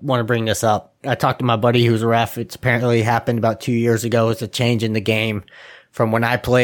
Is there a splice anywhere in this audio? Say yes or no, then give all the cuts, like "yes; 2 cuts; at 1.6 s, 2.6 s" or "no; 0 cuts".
no; 0 cuts